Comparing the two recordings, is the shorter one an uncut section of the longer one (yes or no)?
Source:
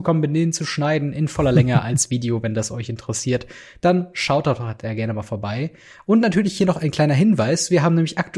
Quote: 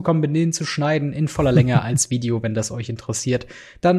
yes